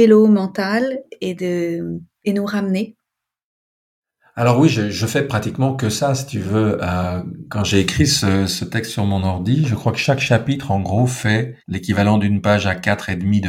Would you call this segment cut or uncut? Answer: cut